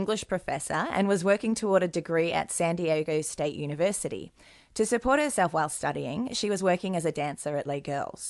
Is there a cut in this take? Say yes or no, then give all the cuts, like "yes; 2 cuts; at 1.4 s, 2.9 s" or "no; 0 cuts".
no; 0 cuts